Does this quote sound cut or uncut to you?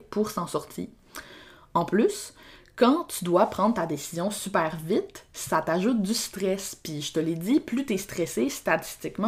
uncut